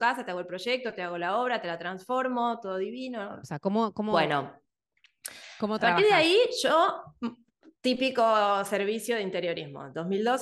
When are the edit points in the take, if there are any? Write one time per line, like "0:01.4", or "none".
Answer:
0:03.4